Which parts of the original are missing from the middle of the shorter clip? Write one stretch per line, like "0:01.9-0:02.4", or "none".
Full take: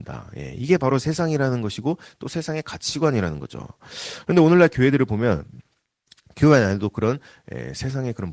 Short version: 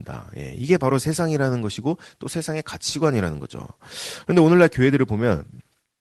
none